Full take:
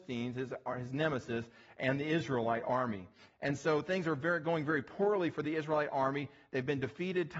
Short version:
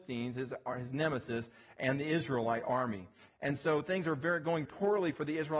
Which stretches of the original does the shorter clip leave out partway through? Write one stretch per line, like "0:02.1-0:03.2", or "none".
0:04.6-0:04.8

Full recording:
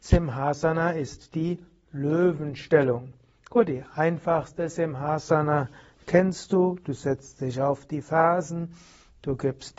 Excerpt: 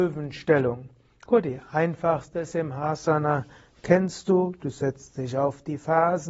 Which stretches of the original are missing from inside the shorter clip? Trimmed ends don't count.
none

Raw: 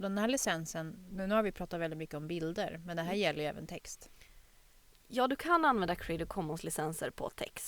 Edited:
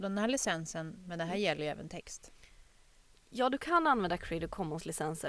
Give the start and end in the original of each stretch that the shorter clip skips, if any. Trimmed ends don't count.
0:01.0-0:02.8

